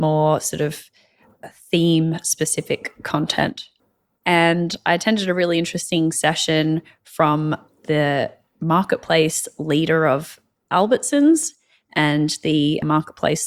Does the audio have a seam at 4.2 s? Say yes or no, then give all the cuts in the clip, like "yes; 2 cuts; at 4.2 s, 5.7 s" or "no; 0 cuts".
yes; 1 cut; at 4.2 s